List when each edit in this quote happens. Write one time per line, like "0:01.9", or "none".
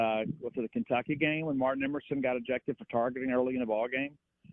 none